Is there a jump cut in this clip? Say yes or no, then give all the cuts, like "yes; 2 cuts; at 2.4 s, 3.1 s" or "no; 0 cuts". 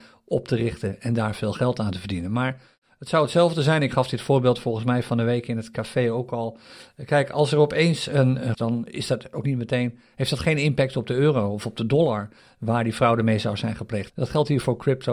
yes; 2 cuts; at 8.5 s, 14.1 s